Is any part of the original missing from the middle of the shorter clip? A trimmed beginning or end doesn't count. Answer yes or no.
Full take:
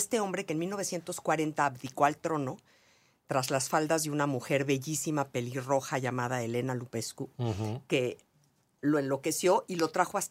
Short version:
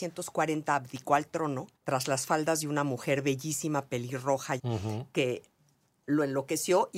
yes